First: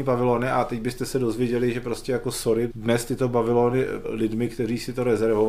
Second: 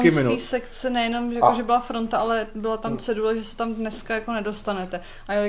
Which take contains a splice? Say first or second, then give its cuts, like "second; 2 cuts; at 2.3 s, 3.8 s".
first; 2 cuts; at 2.7 s, 4.0 s